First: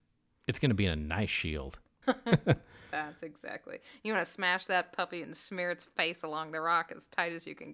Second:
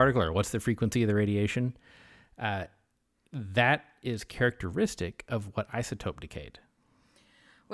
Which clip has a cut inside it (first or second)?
first